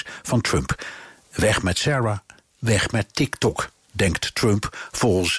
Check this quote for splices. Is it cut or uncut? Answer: uncut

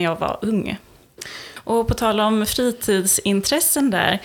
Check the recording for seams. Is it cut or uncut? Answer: cut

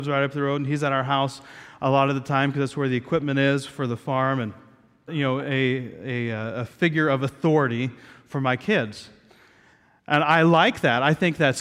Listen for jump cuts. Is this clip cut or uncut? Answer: cut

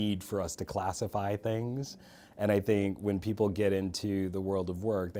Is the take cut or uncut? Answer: uncut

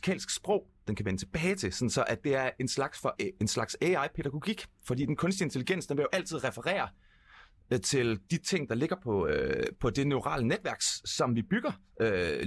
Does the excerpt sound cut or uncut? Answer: cut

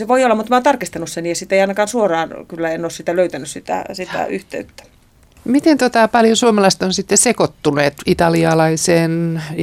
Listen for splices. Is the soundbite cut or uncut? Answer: uncut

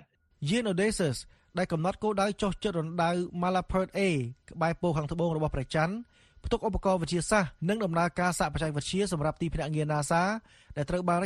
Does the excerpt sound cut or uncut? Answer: cut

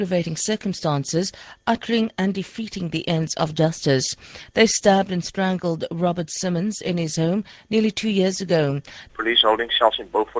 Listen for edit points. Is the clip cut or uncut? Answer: cut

